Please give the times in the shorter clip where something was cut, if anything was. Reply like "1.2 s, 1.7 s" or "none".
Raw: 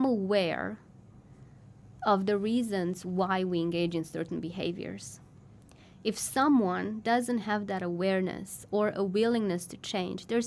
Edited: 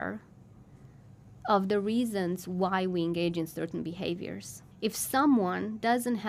4.7 s